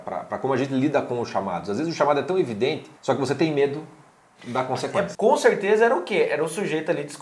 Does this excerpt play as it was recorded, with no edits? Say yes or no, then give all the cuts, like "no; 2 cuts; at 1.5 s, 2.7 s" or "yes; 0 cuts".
no; 2 cuts; at 3.0 s, 5.1 s